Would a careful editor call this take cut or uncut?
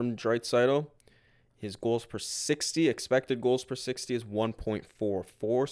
uncut